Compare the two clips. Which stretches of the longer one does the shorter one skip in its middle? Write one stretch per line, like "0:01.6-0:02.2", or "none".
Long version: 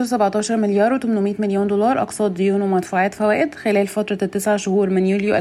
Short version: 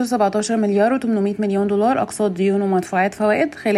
none